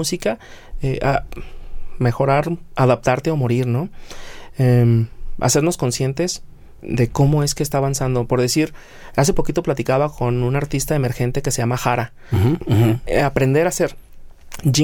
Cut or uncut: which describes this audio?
cut